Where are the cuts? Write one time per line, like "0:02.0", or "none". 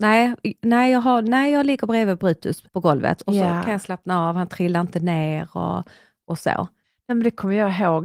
0:02.7